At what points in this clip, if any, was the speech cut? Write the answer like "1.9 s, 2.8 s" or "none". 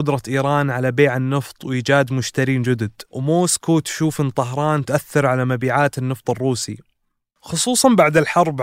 3.1 s